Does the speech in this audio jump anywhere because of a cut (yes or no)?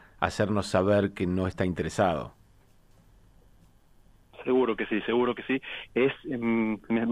no